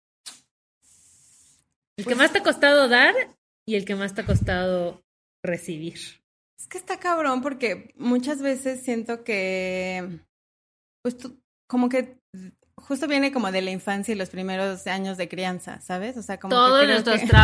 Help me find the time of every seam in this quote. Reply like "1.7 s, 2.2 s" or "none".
none